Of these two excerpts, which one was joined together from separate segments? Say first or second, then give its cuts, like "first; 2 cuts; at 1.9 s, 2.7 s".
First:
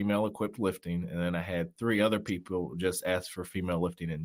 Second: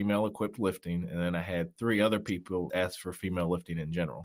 second; 1 cut; at 2.7 s